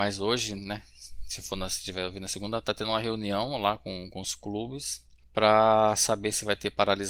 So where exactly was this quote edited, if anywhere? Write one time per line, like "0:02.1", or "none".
none

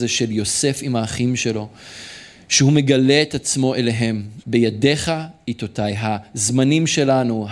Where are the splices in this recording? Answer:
0:04.4

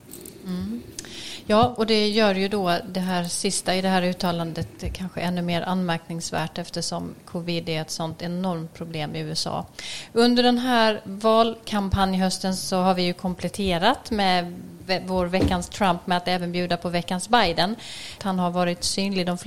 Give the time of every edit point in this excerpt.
0:18.2

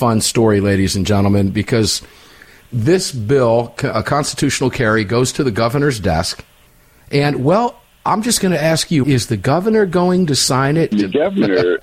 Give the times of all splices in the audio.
0:09.0
0:10.9

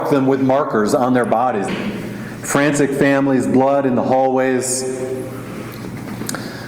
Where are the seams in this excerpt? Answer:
0:01.7

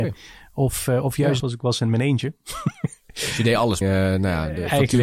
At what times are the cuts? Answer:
0:01.4
0:03.8

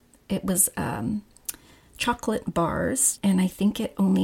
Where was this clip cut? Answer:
0:03.2

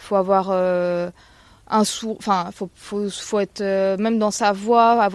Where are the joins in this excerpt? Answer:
none

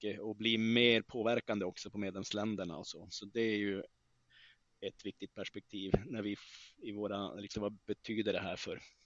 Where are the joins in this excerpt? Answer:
0:07.5

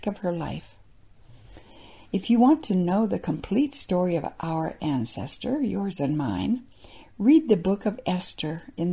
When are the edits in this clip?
none

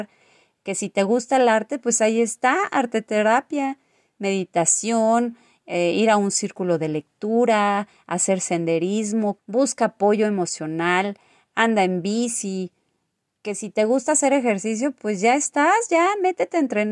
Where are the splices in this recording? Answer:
0:09.4

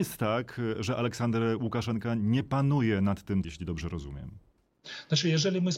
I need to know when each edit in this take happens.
0:03.4

